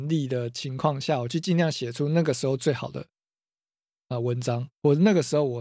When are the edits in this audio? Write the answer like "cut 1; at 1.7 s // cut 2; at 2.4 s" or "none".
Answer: none